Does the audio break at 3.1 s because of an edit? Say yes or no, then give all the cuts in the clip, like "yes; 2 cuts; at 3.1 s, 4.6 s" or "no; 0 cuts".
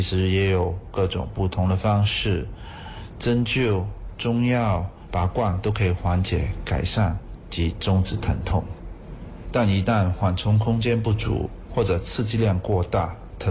no; 2 cuts; at 5.1 s, 9.4 s